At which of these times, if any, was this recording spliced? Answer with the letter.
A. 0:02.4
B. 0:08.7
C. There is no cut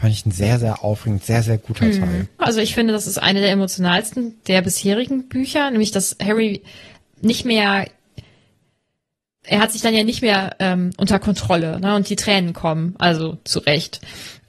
A